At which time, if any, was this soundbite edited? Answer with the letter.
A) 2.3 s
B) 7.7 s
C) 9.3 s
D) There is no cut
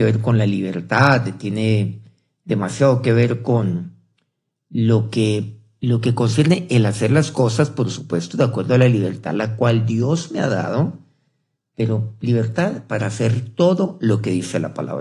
D